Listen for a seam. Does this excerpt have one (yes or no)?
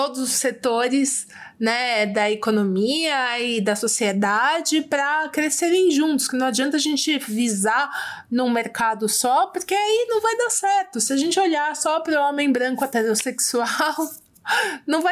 no